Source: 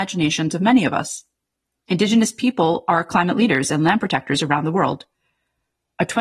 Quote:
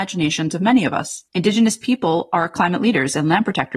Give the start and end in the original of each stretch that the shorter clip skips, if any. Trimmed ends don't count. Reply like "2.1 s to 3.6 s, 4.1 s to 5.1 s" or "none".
1.3 s to 1.8 s